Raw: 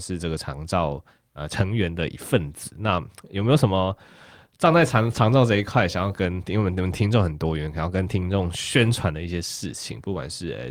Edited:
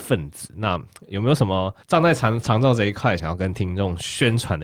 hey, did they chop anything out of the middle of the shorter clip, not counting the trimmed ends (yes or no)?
yes